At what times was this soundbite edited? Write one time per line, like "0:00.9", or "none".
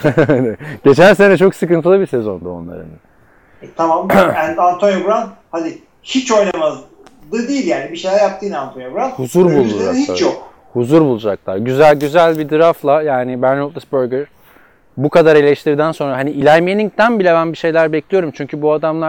none

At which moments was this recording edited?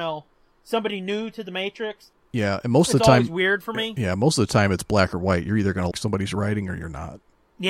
0:05.9

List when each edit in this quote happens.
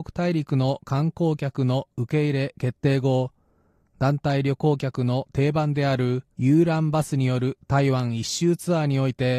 0:06.3

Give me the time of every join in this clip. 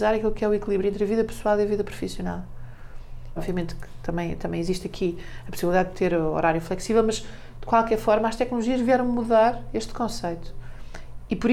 0:03.4

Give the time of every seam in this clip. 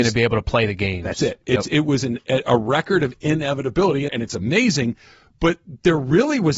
0:04.1

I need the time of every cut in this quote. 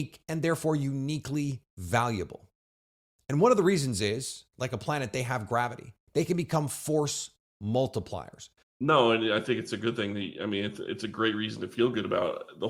0:01.7
0:08.6

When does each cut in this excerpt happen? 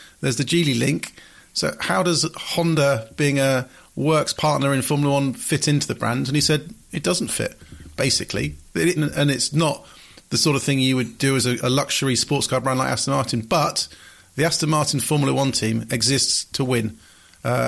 0:09.0
0:11.6

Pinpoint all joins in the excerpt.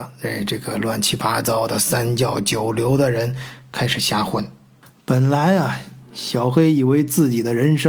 none

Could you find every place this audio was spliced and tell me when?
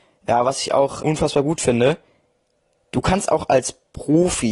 0:01.0

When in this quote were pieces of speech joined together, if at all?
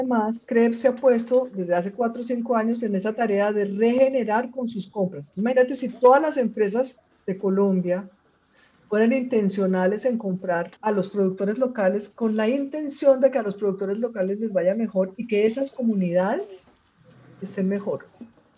0:10.8

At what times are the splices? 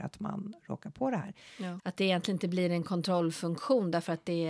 0:01.8

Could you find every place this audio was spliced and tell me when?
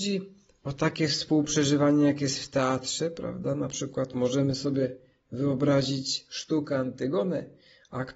none

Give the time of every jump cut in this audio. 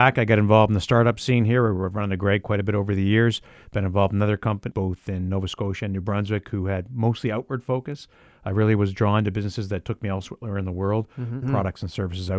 0:04.7
0:11.4

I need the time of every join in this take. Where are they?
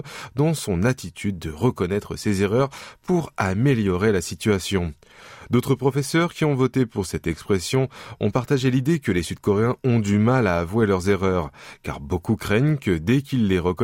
none

